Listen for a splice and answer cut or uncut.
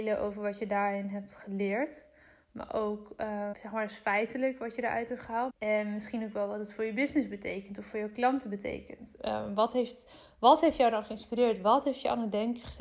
cut